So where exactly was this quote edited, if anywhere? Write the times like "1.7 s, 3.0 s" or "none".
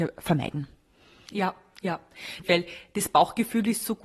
1.3 s, 2.4 s